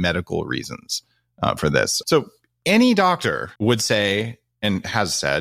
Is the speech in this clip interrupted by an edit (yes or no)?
yes